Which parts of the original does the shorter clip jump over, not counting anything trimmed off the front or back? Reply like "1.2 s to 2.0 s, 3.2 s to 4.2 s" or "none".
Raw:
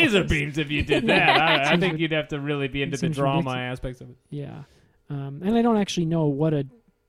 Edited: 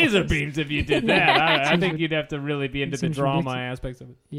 none